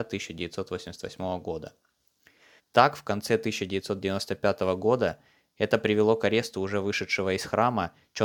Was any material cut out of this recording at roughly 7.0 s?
no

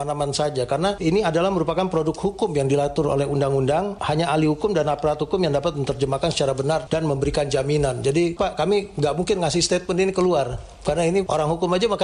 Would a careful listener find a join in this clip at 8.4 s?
yes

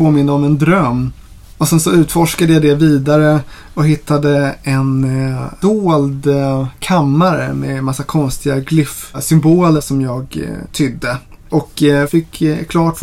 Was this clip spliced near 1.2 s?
no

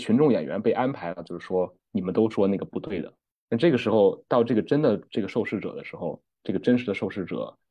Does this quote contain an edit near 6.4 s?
yes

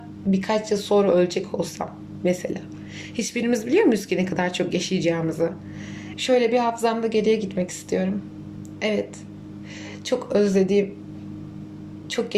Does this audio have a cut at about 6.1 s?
yes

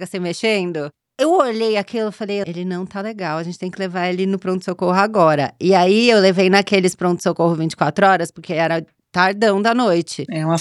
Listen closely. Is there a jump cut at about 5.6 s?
no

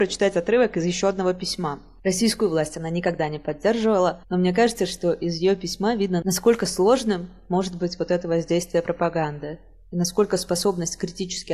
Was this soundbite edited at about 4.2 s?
no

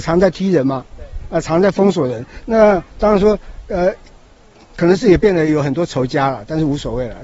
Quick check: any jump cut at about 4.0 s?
no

